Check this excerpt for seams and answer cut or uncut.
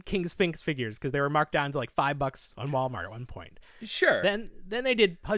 uncut